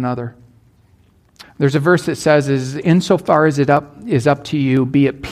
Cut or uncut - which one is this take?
cut